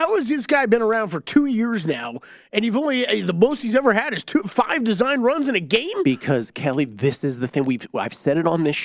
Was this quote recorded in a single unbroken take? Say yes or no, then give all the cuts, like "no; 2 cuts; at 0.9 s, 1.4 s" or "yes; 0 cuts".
yes; 0 cuts